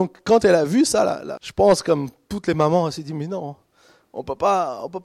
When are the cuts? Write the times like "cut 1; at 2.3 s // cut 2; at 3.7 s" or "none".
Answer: cut 1; at 1.4 s